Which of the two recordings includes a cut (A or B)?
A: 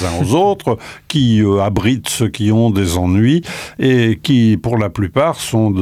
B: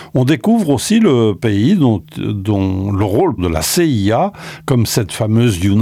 B